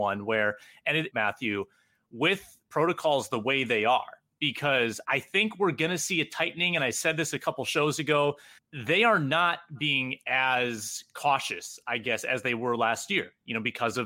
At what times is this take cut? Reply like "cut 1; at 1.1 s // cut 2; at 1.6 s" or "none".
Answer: cut 1; at 1.1 s // cut 2; at 5.0 s // cut 3; at 8.6 s